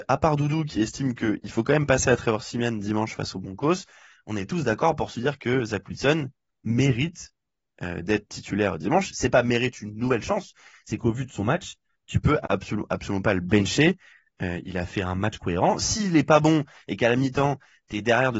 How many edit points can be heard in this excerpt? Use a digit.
0